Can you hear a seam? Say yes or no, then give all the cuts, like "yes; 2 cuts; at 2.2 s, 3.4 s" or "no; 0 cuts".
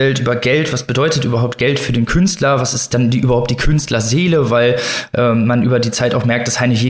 no; 0 cuts